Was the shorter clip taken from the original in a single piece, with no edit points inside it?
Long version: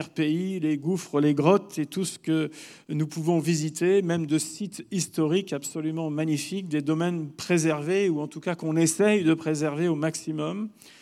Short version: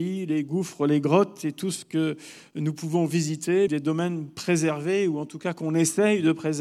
no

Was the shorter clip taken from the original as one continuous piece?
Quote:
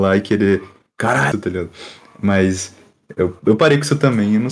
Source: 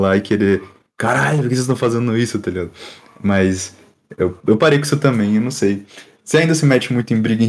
no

